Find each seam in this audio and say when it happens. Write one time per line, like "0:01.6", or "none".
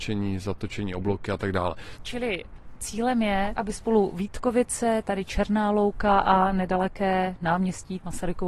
0:02.0